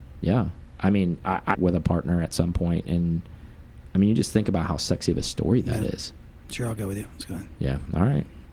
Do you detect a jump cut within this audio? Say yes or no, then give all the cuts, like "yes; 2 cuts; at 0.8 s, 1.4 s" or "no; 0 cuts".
yes; 1 cut; at 1.5 s